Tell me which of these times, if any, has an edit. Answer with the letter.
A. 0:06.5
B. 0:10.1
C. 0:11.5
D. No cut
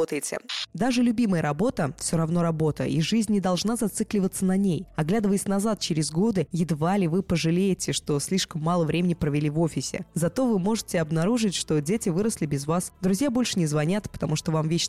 D